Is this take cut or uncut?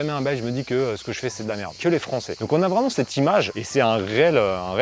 uncut